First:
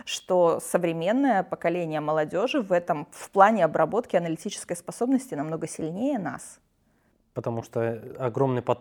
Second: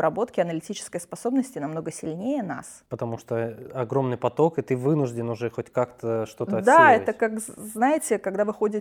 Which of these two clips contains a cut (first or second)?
second